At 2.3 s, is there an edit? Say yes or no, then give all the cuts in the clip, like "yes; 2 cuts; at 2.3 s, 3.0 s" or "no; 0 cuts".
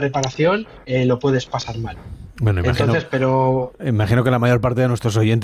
no; 0 cuts